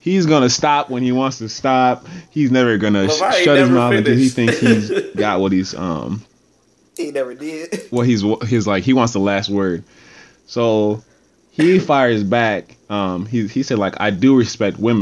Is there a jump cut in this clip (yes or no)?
yes